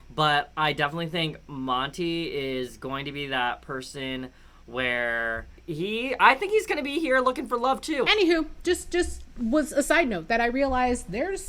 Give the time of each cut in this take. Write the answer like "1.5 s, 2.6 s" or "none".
8.0 s